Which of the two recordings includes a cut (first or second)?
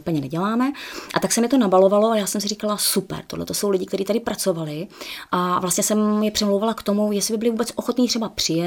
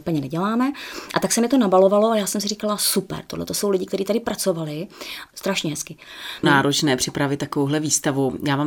second